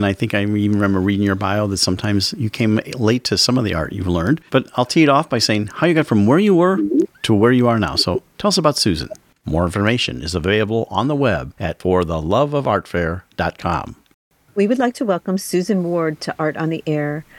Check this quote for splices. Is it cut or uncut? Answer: cut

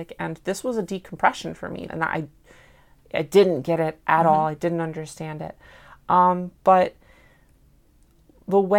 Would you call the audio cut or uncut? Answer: cut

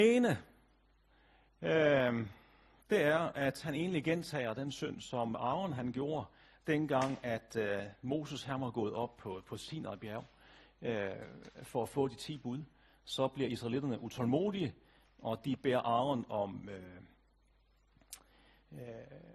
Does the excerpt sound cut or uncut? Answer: uncut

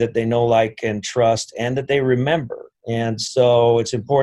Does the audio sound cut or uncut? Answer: cut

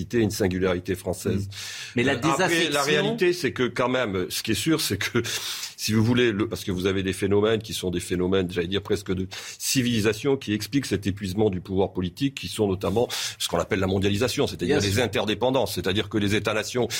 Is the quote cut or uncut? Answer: cut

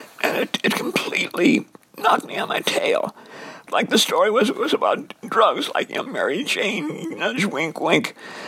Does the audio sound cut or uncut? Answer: cut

